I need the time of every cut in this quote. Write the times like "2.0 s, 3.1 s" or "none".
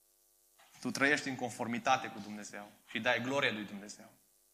none